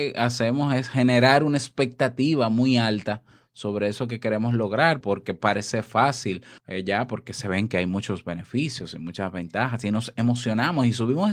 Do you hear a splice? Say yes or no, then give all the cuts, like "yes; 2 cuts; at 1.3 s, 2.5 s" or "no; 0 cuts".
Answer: yes; 2 cuts; at 5.0 s, 6.6 s